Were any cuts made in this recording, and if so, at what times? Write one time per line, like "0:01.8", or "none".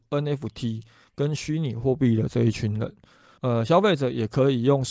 0:03.4